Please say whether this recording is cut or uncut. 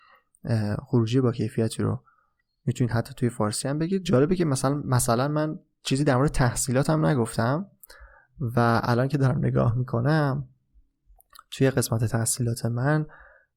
uncut